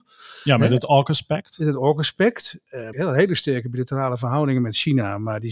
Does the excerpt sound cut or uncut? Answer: cut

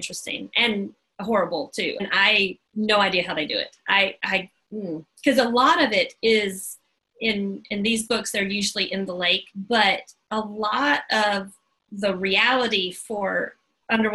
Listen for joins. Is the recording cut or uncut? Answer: cut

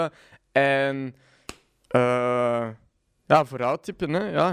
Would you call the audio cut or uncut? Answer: uncut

